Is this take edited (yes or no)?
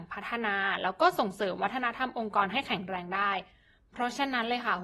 no